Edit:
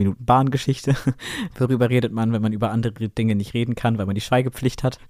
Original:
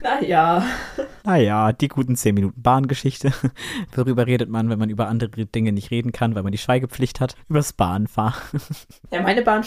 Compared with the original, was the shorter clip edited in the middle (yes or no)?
no